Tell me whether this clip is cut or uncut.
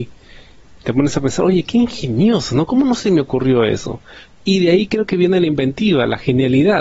cut